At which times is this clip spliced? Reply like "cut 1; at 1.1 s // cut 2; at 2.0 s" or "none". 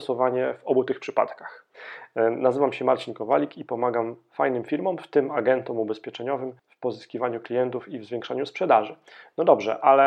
cut 1; at 1.7 s // cut 2; at 6.6 s